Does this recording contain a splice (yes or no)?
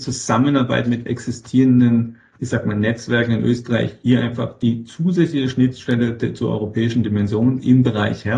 no